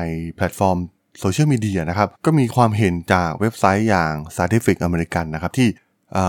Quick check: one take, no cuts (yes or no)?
no